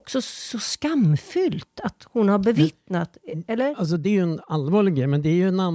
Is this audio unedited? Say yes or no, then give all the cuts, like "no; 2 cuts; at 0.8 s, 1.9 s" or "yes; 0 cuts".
yes; 0 cuts